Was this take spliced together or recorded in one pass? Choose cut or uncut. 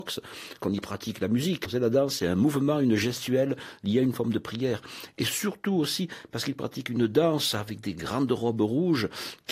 cut